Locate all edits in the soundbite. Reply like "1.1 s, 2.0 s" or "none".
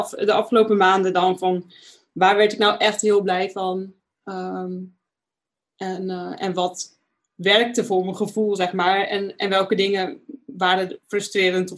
none

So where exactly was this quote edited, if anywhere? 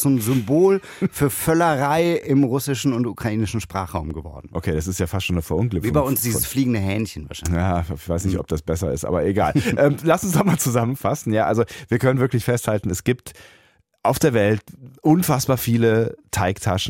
none

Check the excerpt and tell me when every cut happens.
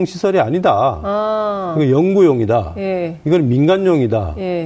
none

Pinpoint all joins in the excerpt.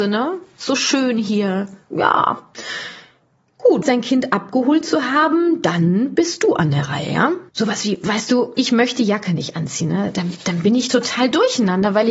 3.8 s, 7.5 s, 8.6 s

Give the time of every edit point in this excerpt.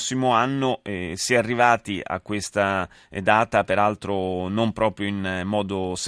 none

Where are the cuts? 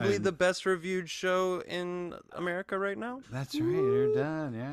3.2 s

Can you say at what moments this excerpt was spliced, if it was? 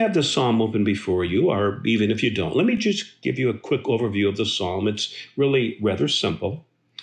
none

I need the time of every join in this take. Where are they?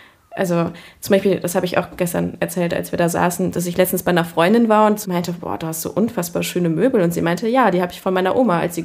5.0 s

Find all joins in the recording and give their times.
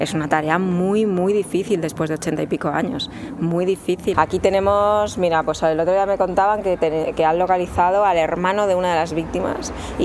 4.1 s

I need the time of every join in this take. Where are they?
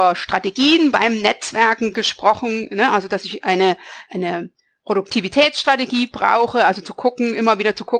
4.1 s

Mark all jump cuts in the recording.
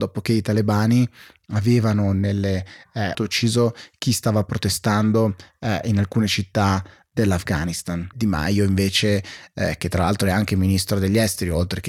3.1 s, 8.1 s

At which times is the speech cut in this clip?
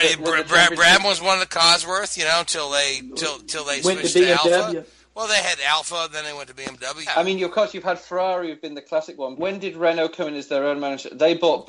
7.1 s, 9.4 s

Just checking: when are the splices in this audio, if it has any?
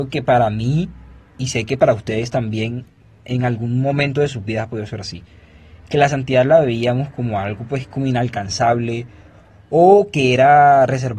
none

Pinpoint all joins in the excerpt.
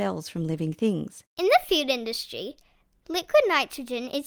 1.2 s

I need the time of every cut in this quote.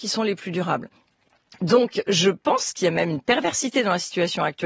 none

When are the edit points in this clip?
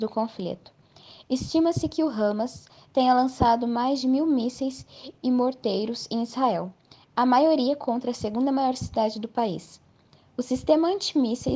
none

